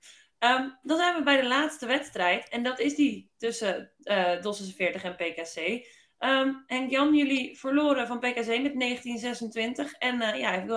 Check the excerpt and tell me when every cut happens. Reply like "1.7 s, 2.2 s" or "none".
none